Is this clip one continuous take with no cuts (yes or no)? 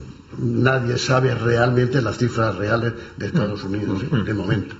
yes